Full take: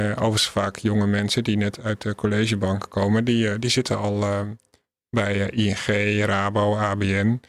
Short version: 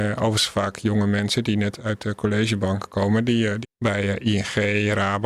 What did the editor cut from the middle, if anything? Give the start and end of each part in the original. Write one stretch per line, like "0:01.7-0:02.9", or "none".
0:03.6-0:04.9